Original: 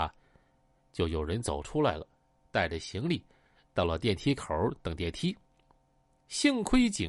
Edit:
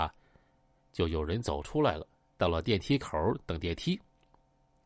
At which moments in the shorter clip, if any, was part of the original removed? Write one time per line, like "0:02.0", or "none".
0:02.3